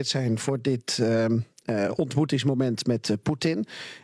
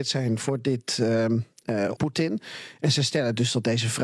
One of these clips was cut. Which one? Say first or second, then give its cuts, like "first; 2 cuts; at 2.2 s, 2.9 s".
second; 1 cut; at 2.0 s